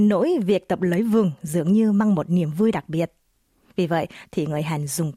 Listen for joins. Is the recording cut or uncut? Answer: cut